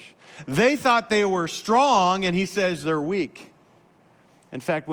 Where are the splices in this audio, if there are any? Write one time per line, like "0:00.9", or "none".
none